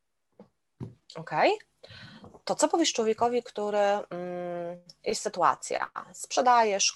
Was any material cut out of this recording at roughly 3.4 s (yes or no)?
no